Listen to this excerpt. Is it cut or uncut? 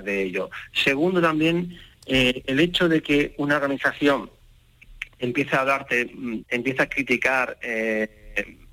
cut